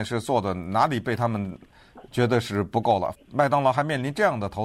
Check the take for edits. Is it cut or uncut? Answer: cut